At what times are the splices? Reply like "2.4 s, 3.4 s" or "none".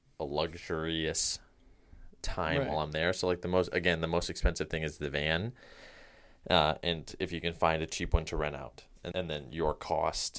9.1 s